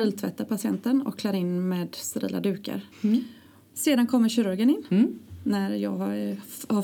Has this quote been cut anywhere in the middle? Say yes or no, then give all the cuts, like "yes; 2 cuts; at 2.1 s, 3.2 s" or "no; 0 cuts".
yes; 1 cut; at 2.9 s